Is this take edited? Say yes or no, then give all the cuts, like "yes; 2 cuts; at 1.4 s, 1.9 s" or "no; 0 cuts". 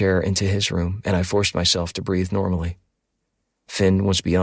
no; 0 cuts